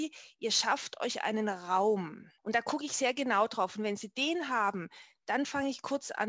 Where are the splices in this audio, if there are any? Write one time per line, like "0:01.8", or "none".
0:02.4